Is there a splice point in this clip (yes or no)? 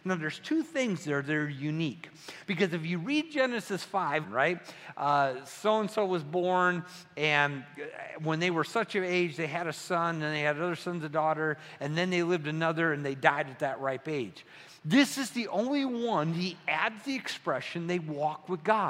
yes